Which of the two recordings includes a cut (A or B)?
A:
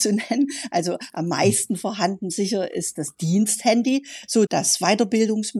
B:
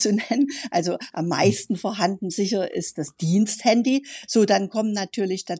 A